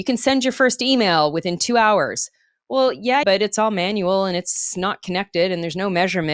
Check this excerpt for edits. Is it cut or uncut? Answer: cut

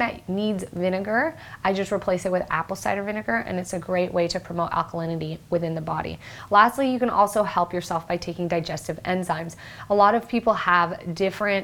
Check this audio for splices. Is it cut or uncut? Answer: uncut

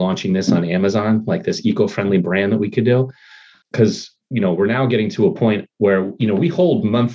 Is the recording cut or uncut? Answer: uncut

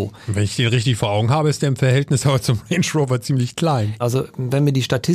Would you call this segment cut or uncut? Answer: cut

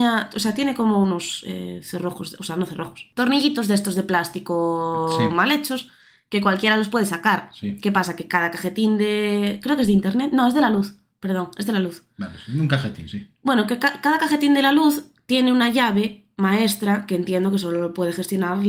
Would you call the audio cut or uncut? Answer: uncut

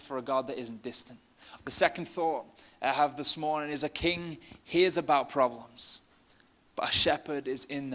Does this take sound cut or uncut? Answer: cut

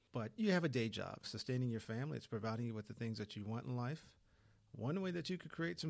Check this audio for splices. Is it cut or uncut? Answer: cut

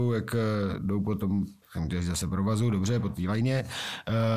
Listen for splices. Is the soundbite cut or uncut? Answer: cut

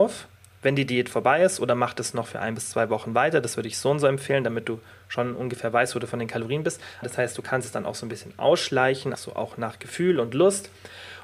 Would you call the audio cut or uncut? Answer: cut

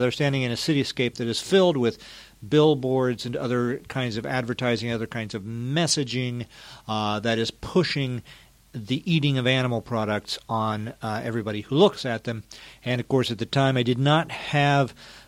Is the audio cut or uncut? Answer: uncut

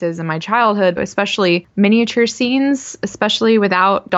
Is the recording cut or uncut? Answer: cut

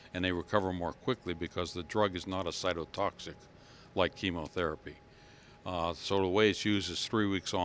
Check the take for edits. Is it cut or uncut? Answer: uncut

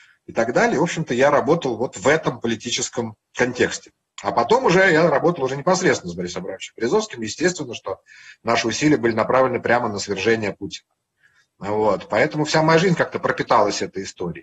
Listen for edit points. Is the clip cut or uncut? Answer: uncut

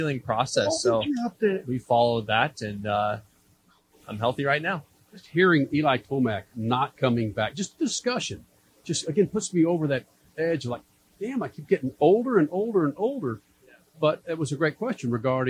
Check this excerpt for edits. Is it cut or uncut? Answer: uncut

